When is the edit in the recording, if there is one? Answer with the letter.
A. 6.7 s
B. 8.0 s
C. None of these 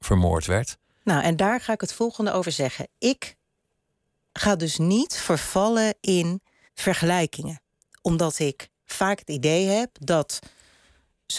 A